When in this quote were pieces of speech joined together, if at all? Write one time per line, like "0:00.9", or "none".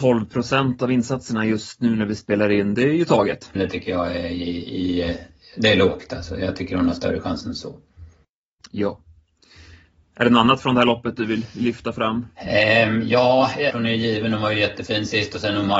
0:03.6
0:13.7